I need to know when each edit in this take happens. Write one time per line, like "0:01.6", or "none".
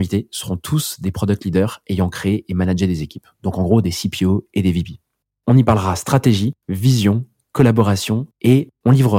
none